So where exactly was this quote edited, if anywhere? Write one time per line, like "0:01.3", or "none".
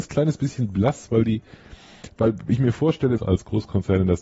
0:03.2